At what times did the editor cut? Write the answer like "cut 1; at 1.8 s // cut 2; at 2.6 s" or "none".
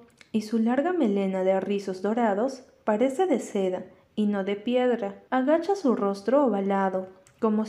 cut 1; at 5.3 s